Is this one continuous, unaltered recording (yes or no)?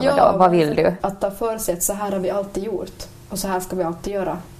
no